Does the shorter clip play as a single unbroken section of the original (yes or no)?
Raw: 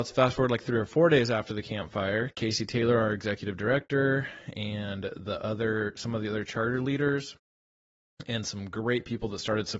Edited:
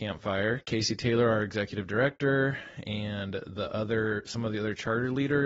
yes